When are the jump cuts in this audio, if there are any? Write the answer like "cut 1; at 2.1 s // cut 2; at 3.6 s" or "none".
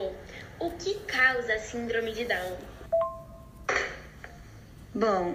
none